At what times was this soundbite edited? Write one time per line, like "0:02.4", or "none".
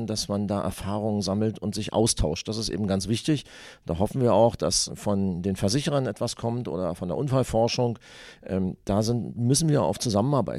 0:04.9